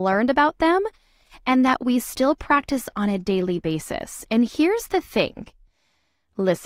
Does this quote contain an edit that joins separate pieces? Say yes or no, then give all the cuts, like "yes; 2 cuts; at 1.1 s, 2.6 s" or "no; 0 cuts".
no; 0 cuts